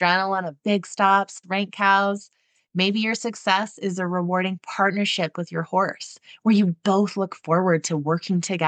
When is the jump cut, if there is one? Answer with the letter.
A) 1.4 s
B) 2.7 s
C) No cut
A